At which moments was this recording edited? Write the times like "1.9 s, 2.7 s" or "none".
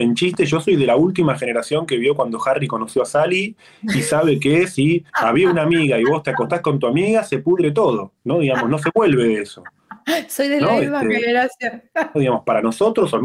5.1 s, 12.1 s